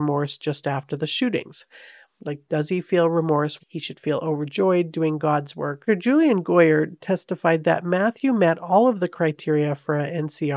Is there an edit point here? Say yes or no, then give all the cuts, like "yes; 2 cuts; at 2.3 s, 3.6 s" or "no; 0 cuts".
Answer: yes; 2 cuts; at 3.6 s, 5.9 s